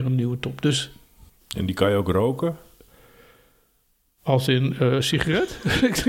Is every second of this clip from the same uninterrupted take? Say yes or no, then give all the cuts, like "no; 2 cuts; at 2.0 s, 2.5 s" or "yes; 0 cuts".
yes; 0 cuts